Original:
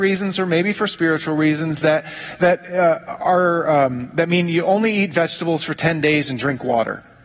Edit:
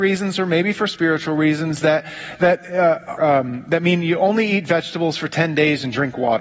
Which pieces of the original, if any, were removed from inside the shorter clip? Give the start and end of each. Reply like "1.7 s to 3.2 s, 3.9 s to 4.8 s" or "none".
3.2 s to 3.6 s